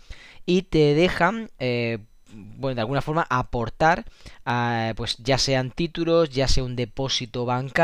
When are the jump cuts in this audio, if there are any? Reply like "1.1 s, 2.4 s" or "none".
none